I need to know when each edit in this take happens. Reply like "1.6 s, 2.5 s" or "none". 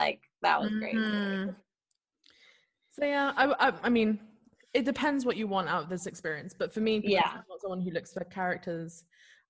none